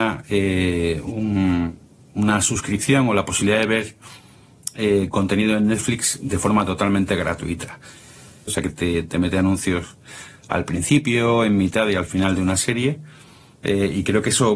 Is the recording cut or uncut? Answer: cut